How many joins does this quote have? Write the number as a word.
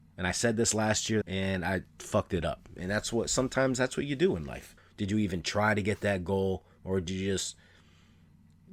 two